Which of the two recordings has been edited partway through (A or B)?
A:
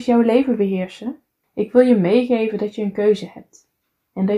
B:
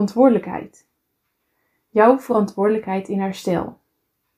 A